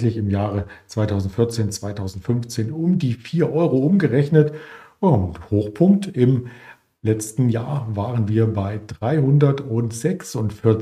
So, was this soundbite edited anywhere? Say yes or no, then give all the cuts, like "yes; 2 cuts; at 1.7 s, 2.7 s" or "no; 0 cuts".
no; 0 cuts